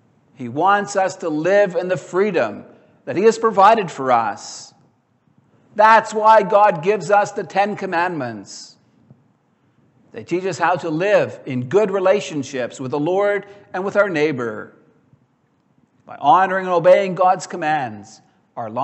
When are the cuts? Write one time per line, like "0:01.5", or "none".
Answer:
none